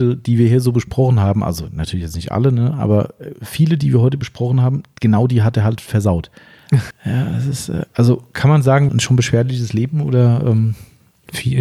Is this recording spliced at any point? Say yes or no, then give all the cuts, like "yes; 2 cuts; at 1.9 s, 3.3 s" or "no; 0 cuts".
yes; 2 cuts; at 6.9 s, 8.9 s